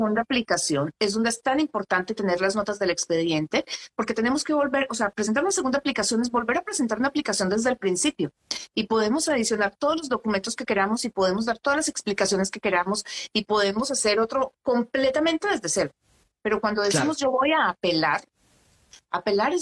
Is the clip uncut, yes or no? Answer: yes